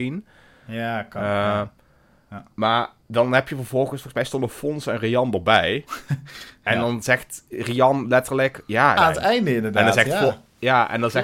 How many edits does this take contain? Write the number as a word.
one